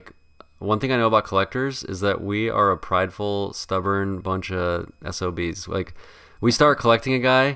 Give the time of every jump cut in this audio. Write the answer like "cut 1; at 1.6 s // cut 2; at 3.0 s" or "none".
none